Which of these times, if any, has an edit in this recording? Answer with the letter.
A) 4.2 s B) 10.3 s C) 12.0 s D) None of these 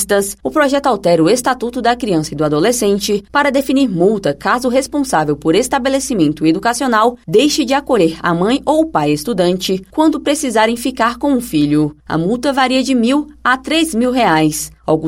D